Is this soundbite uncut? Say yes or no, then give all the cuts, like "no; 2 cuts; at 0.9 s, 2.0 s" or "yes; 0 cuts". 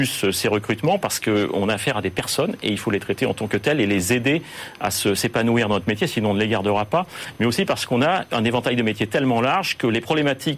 yes; 0 cuts